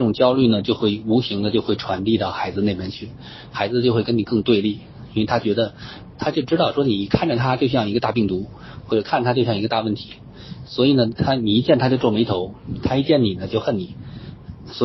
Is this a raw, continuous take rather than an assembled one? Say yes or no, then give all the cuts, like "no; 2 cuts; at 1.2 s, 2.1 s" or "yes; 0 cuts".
yes; 0 cuts